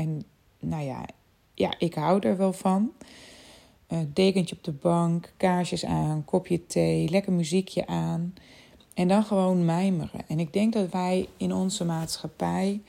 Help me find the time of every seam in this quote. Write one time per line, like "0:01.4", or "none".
none